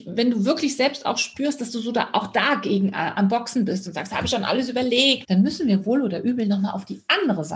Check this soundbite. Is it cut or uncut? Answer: cut